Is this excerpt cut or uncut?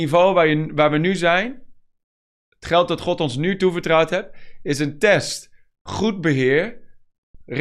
uncut